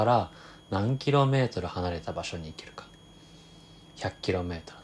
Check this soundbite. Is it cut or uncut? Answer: uncut